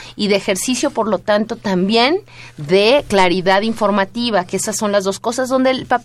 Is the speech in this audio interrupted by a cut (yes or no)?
no